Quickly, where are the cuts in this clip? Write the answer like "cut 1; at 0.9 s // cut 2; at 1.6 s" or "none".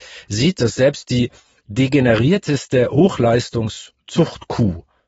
none